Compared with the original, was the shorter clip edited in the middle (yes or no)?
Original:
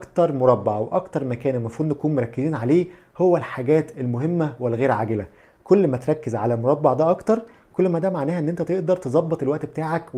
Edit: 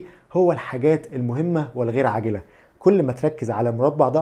no